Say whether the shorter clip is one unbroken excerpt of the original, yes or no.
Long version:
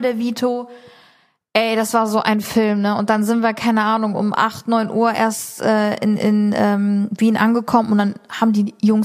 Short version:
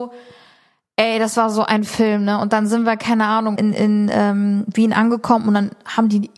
no